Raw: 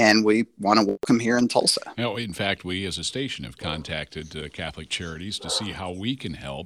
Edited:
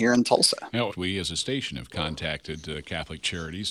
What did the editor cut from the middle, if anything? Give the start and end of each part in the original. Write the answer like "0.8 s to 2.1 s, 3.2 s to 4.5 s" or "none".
2.1 s to 2.6 s